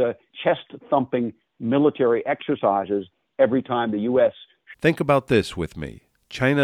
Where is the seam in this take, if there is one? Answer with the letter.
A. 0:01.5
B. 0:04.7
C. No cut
B